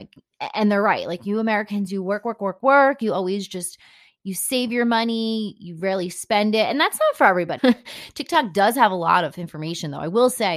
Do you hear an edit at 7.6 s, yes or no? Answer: yes